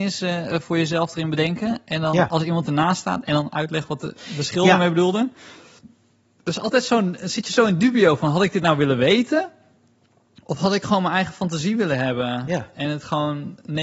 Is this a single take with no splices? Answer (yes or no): yes